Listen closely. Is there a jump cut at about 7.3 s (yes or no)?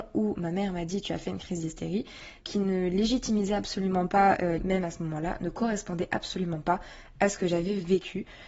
no